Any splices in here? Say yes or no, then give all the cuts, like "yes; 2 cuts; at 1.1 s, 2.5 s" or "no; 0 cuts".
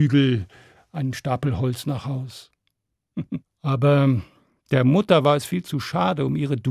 yes; 1 cut; at 3.4 s